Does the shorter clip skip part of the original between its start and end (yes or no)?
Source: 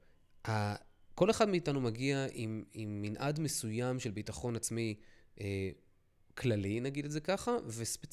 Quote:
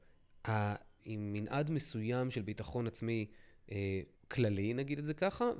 yes